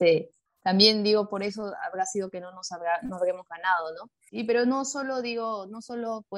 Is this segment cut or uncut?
cut